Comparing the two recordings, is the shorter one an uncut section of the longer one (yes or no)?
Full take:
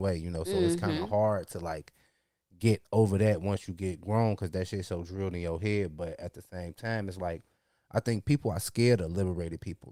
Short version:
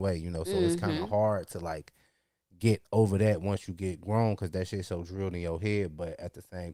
yes